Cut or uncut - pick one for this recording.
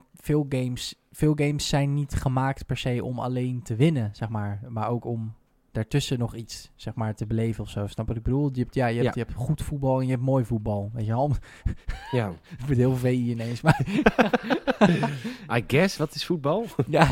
uncut